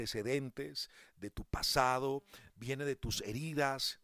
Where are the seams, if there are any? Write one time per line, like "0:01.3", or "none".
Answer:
0:02.5